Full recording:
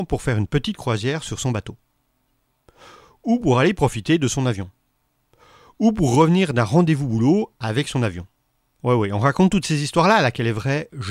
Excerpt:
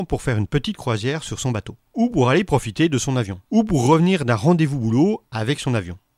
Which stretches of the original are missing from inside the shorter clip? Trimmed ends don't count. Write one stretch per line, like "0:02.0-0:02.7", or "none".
0:01.9-0:03.2
0:04.7-0:05.7